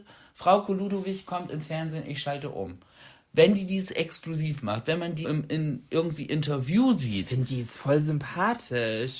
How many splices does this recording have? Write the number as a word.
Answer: one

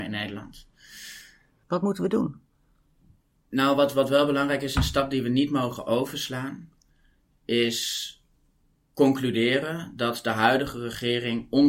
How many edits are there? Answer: one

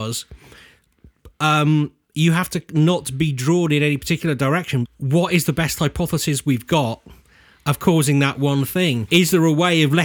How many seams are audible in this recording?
two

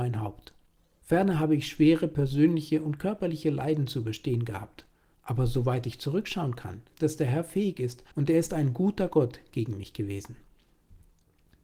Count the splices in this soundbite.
two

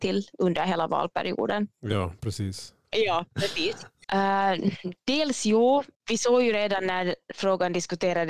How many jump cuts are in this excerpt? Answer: three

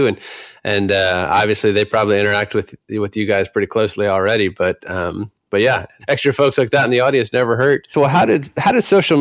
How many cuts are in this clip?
one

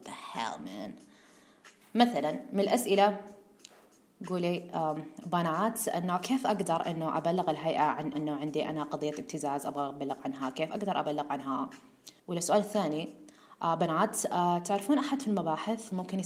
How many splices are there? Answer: two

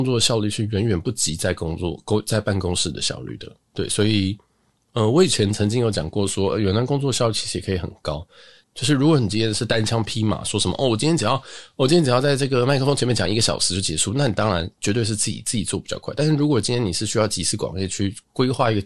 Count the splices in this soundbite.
one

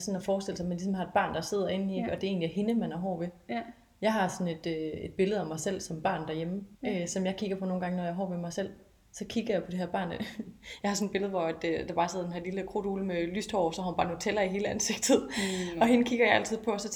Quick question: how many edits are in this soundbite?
one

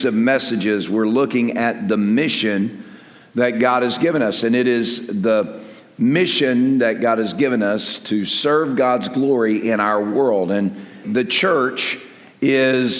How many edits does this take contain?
one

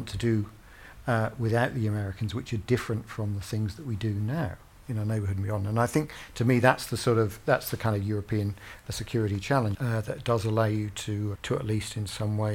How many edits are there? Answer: three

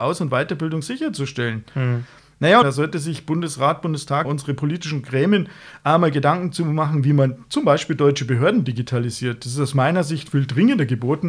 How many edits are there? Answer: two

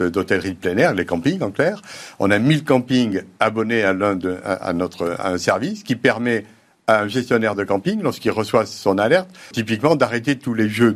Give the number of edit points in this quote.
one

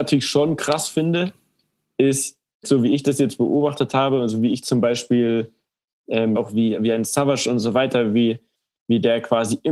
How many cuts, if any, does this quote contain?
two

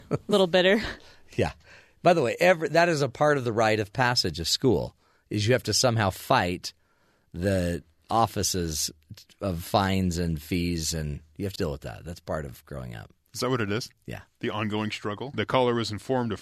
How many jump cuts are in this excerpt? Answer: two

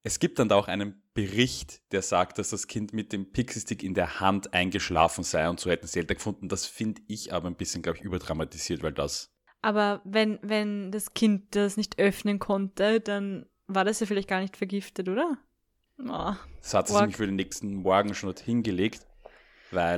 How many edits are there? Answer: one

